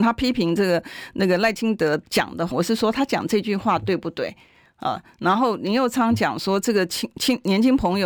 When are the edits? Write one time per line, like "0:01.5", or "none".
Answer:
0:02.5

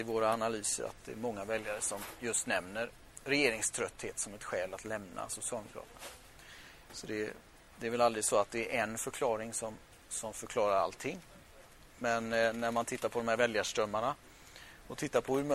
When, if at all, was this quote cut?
none

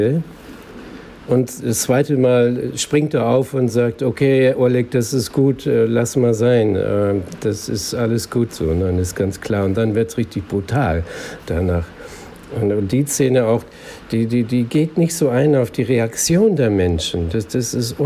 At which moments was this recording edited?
0:08.5

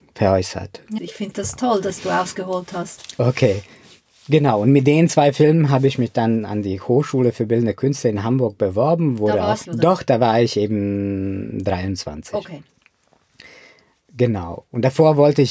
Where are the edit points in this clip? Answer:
0:01.0
0:09.6

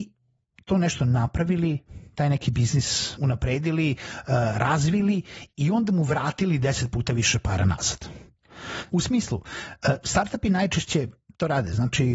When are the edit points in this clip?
0:03.2
0:08.9

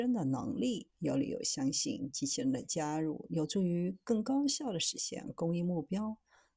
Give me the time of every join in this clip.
0:00.9

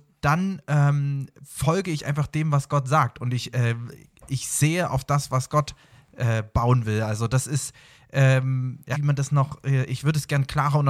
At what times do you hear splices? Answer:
0:08.9

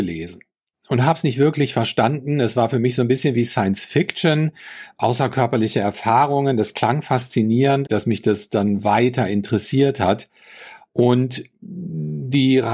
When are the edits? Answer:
0:07.9
0:10.9

